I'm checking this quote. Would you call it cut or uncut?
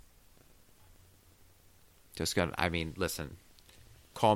uncut